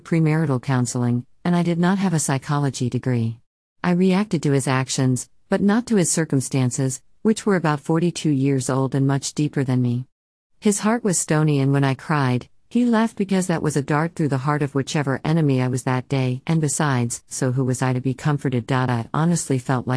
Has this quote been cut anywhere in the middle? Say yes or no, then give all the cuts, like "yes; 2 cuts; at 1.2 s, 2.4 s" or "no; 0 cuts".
yes; 2 cuts; at 3.8 s, 17.3 s